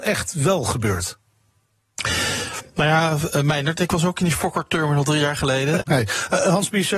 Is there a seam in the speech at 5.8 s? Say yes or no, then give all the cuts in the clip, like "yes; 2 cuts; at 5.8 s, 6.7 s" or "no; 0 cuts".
yes; 1 cut; at 5.8 s